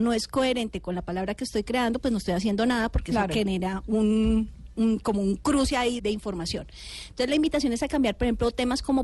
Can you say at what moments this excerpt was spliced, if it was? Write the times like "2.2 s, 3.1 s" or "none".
6.0 s